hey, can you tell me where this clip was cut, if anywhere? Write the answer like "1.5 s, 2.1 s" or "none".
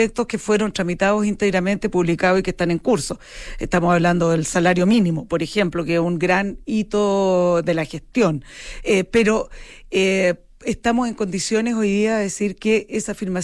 none